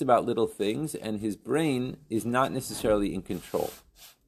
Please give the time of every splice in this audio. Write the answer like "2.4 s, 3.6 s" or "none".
none